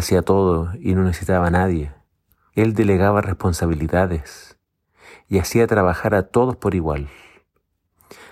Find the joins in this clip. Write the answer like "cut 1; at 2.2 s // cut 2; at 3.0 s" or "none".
cut 1; at 2.5 s